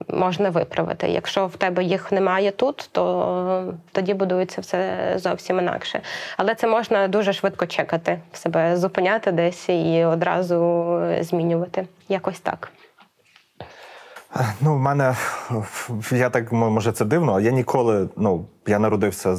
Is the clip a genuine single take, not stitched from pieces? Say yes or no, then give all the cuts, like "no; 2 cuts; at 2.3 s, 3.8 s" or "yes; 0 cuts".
yes; 0 cuts